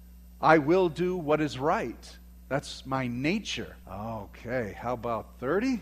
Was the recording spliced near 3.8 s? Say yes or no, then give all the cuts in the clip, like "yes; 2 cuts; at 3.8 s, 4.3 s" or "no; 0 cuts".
yes; 1 cut; at 3.8 s